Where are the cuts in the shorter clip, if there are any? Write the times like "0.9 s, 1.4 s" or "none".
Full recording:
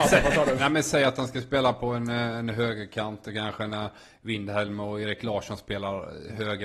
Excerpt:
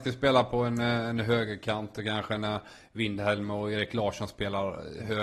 none